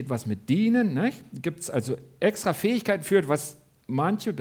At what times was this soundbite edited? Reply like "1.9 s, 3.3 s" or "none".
none